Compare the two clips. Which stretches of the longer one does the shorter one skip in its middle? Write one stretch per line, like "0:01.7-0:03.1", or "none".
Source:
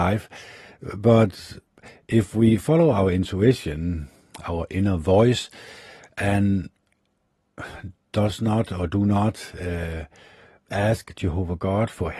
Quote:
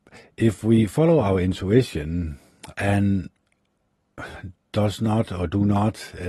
0:04.4-0:06.1